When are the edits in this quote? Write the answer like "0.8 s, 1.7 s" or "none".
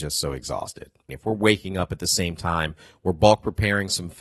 1.1 s, 3.0 s